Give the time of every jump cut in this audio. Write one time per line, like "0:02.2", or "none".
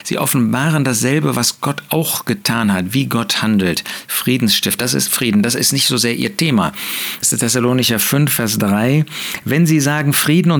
0:04.8
0:07.2